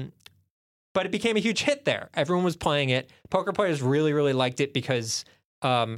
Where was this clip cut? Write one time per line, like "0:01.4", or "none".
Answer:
none